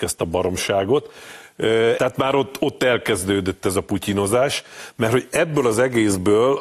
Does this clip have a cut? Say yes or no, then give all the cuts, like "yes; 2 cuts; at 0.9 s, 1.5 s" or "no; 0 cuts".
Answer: yes; 1 cut; at 2.0 s